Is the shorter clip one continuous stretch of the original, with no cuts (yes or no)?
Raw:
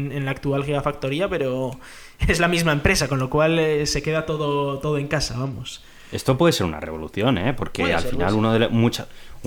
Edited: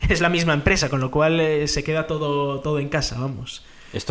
yes